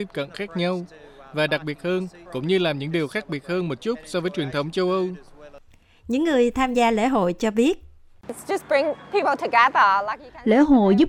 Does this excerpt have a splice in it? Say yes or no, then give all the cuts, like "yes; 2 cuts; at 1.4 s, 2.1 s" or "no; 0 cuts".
yes; 1 cut; at 2.3 s